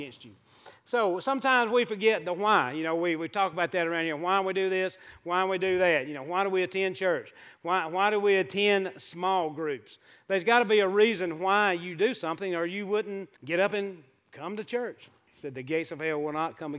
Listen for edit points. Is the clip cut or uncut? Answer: cut